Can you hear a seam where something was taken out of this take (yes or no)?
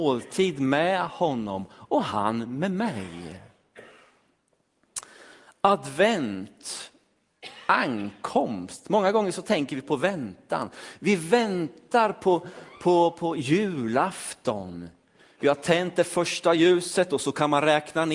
no